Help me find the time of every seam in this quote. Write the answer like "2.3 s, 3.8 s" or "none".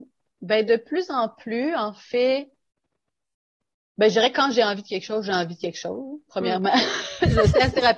none